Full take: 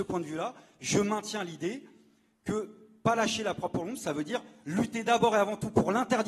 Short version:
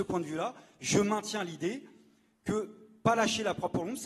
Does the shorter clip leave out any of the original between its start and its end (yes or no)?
no